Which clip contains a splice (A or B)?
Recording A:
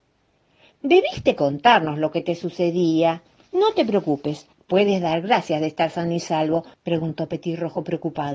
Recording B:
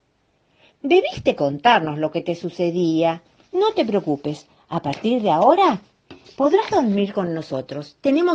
A